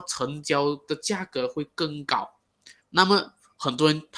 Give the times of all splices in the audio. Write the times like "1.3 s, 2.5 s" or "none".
2.8 s